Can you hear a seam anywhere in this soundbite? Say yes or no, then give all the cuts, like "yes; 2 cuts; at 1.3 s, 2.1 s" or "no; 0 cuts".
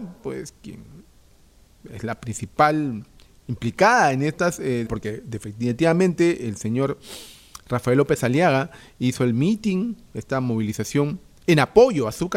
yes; 1 cut; at 4.9 s